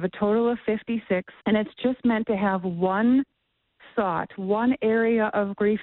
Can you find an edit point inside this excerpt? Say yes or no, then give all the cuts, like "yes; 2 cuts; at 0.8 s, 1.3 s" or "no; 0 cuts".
yes; 1 cut; at 1.4 s